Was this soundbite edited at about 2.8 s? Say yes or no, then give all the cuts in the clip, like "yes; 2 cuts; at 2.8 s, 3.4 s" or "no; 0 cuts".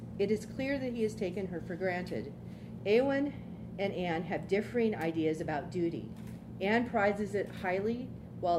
yes; 1 cut; at 2.8 s